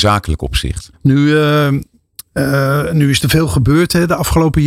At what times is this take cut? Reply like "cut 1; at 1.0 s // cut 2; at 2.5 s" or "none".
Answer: cut 1; at 0.9 s